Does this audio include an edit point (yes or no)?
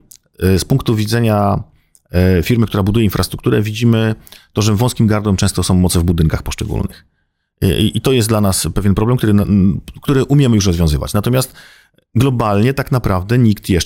no